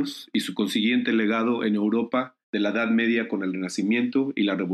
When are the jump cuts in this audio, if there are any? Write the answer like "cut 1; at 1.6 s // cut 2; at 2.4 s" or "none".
cut 1; at 2.4 s